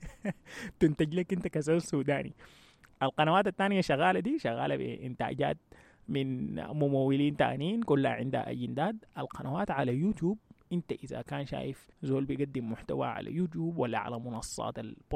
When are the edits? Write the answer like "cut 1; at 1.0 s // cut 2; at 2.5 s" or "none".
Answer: cut 1; at 11.9 s